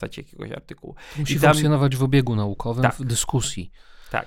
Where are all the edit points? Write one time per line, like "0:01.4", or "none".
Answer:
none